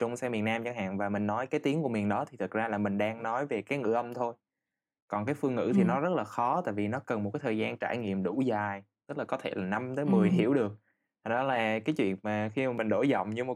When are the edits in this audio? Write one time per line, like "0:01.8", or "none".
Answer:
0:10.3